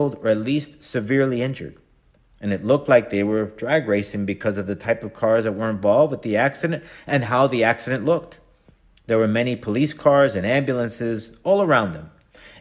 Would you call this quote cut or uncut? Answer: uncut